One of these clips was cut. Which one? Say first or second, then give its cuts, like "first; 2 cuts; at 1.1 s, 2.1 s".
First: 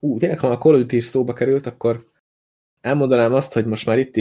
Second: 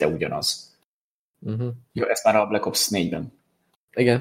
second; 1 cut; at 1.9 s